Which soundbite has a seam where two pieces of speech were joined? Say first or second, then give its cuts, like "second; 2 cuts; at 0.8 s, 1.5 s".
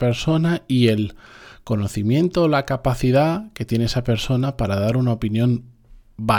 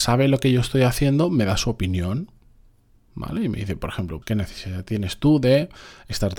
second; 1 cut; at 4.2 s